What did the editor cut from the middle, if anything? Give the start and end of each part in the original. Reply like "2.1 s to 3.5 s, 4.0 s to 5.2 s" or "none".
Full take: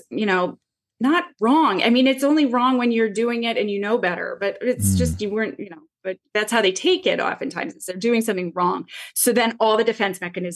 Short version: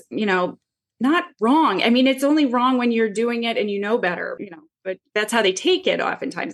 4.4 s to 5.6 s